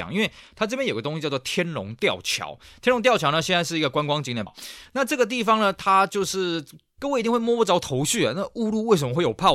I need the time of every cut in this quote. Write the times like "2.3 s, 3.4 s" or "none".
4.5 s, 7.0 s